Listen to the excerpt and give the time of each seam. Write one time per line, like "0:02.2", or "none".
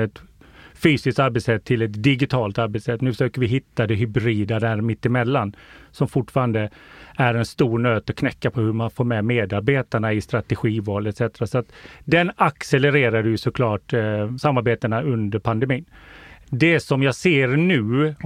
none